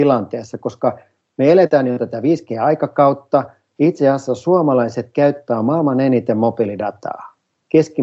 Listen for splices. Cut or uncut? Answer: uncut